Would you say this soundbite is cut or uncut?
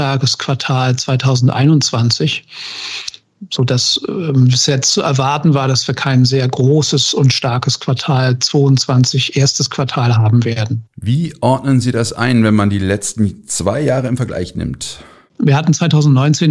uncut